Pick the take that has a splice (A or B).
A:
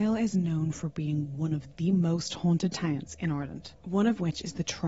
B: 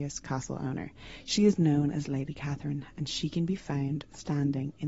A